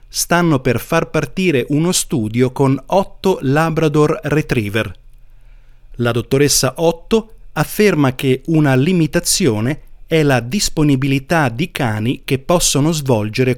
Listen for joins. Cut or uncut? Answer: cut